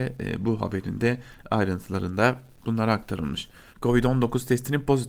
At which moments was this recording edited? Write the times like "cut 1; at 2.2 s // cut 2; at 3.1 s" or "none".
cut 1; at 3.7 s

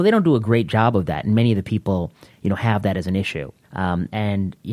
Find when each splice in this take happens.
cut 1; at 3.6 s

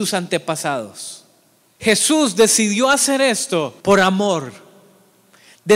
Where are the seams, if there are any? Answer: cut 1; at 1.8 s // cut 2; at 3.8 s

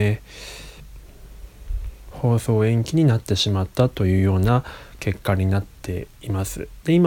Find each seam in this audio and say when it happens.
cut 1; at 2.1 s

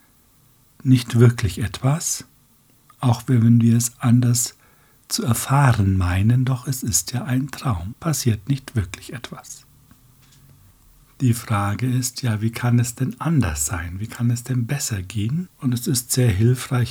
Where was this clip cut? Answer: cut 1; at 7.9 s // cut 2; at 15.5 s

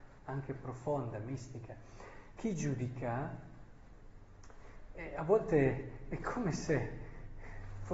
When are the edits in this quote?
cut 1; at 2.4 s

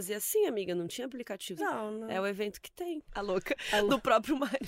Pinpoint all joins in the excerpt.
cut 1; at 1.6 s // cut 2; at 3.1 s

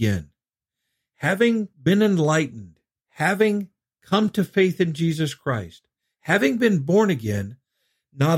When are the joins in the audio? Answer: cut 1; at 6.0 s

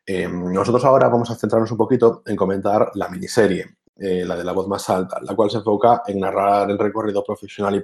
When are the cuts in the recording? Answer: none

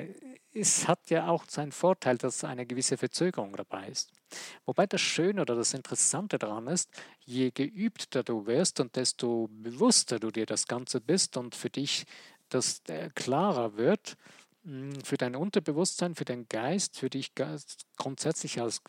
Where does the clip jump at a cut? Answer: none

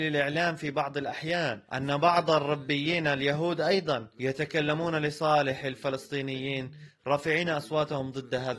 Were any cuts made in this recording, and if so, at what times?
cut 1; at 1.7 s // cut 2; at 4.1 s

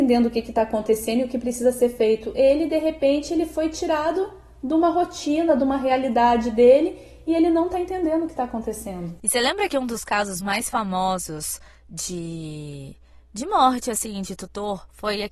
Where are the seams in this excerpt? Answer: none

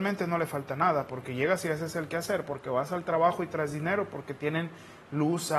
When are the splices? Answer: none

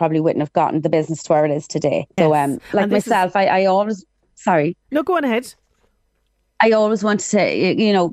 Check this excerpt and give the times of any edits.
cut 1; at 2.2 s

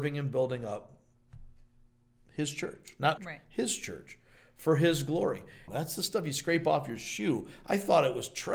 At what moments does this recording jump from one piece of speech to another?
cut 1; at 3.2 s // cut 2; at 5.7 s

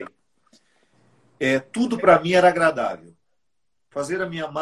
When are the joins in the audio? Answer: none

